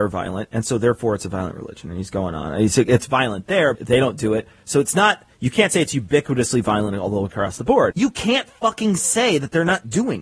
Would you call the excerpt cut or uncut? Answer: cut